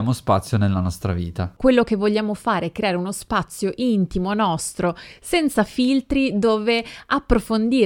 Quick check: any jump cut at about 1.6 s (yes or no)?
yes